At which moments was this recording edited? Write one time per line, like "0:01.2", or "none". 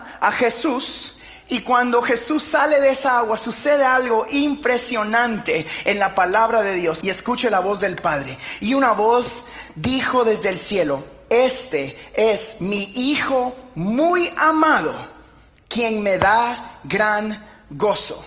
0:07.0